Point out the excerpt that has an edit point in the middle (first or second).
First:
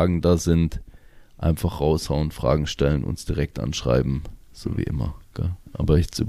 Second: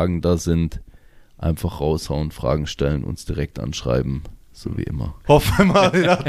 second